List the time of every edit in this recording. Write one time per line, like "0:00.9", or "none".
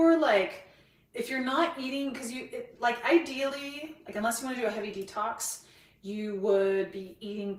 none